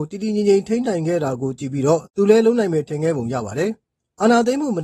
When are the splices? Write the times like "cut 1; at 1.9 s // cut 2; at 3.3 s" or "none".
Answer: cut 1; at 2.1 s